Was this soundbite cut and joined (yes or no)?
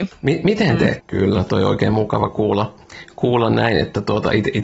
yes